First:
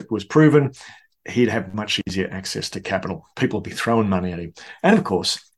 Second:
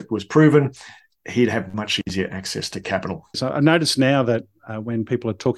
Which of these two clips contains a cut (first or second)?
second